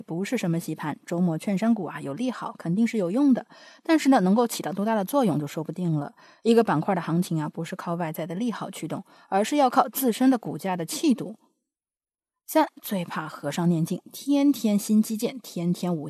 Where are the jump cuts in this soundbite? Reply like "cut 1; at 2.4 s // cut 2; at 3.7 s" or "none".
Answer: none